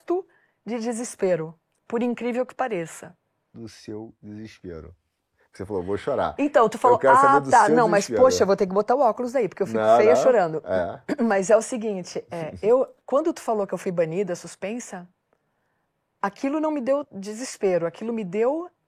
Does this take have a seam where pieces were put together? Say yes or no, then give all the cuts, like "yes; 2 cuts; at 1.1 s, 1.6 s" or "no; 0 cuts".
yes; 1 cut; at 3.5 s